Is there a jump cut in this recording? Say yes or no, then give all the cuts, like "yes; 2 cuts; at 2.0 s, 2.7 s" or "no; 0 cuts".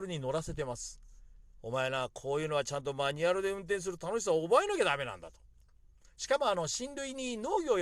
no; 0 cuts